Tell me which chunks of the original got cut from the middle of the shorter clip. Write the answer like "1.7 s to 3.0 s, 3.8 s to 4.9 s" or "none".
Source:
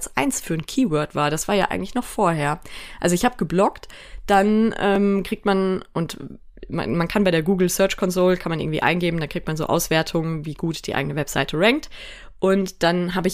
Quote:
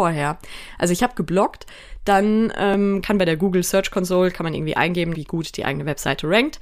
5.2 s to 7.1 s, 9.2 s to 10.4 s